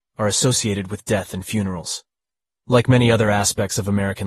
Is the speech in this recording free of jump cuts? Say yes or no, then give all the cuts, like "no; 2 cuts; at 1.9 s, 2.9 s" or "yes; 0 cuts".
no; 1 cut; at 2.6 s